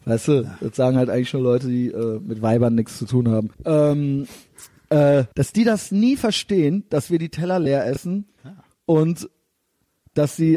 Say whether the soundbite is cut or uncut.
cut